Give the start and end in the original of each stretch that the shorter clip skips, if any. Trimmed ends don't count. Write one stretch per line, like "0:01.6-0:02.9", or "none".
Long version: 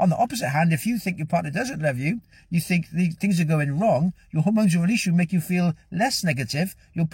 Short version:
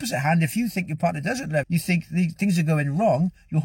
0:01.9-0:02.4